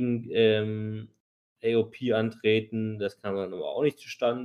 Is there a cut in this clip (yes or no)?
no